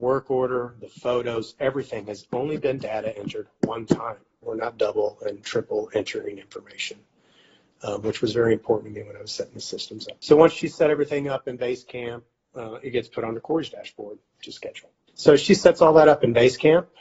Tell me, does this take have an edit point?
yes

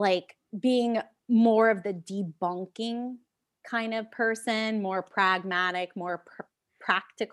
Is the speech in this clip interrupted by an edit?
no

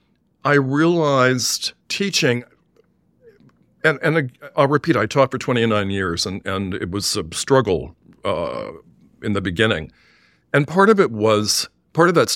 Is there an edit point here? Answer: yes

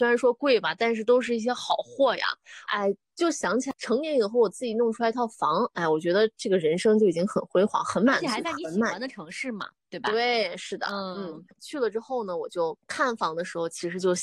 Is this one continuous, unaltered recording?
no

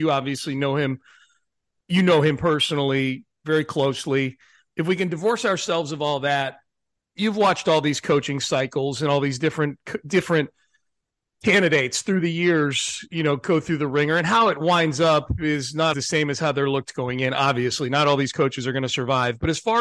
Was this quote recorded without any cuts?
no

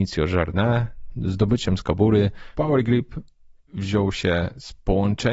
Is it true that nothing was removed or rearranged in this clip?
no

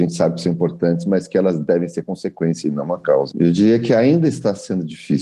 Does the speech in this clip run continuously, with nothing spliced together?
no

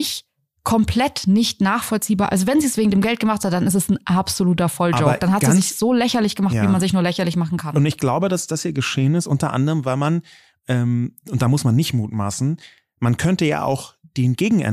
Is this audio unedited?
yes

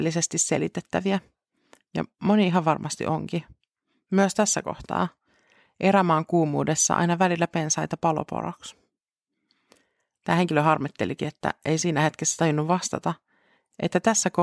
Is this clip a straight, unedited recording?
yes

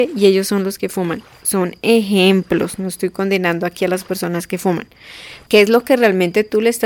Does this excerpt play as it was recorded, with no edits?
no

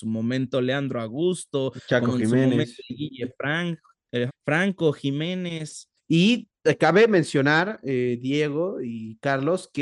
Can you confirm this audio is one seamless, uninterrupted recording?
no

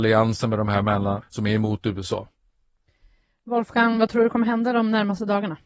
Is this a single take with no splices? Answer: no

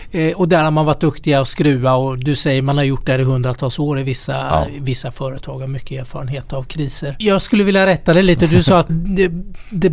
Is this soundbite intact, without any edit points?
no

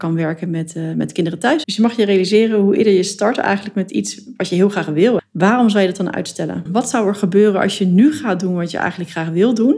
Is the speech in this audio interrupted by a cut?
yes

